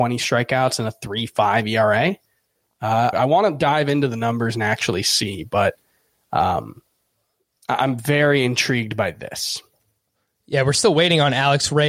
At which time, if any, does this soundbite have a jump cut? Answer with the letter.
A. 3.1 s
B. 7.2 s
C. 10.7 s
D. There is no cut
A